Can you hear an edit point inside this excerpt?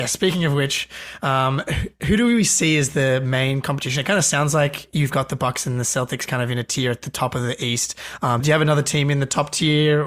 yes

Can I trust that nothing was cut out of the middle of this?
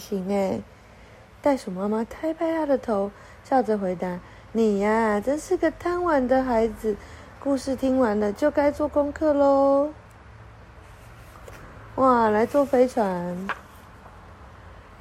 yes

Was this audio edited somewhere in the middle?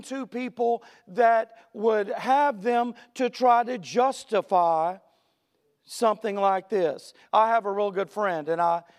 yes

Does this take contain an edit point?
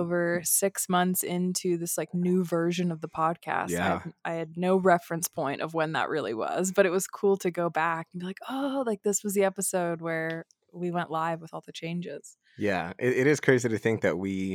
no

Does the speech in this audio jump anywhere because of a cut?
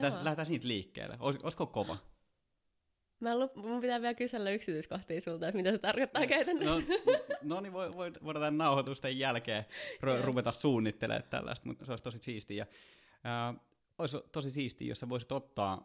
yes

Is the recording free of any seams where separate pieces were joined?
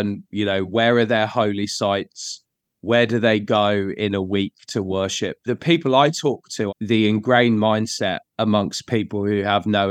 no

